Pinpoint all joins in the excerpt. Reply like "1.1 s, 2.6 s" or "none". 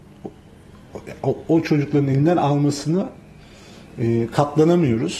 none

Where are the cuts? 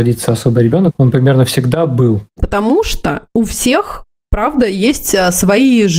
2.4 s

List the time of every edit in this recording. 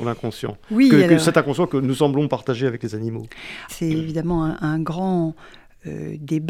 3.7 s

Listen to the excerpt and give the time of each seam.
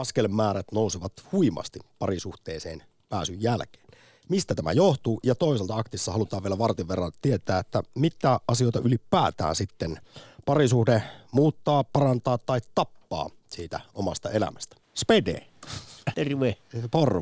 14.8 s, 16.1 s

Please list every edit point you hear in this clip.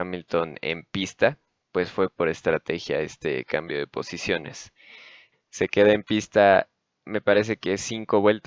5.3 s

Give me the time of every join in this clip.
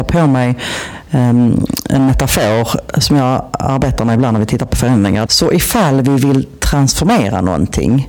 5.3 s

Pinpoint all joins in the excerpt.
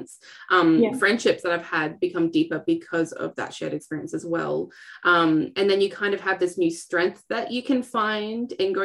none

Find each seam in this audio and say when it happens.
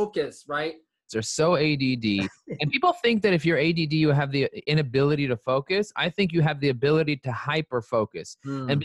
1.1 s, 5.9 s

